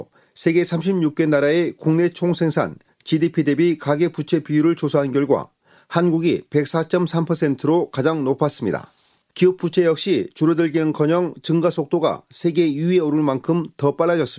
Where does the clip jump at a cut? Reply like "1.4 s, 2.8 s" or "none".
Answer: 9.2 s